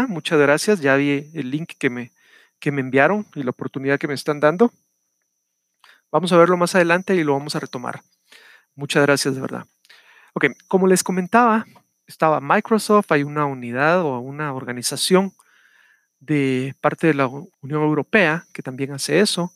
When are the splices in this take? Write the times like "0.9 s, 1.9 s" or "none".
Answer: 11.9 s, 17.5 s